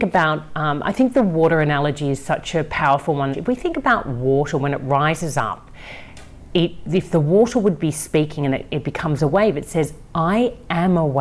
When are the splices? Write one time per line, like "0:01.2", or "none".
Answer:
0:03.3